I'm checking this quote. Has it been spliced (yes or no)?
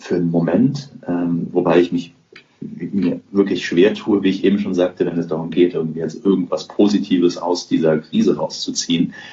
no